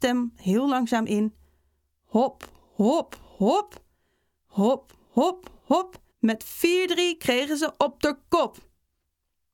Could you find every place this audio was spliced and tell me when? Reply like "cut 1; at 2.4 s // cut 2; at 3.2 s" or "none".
cut 1; at 6.1 s